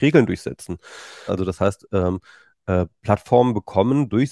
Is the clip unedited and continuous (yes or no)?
no